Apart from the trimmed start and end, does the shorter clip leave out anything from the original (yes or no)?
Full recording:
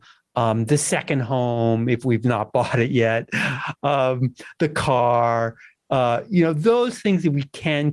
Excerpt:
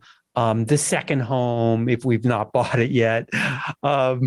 no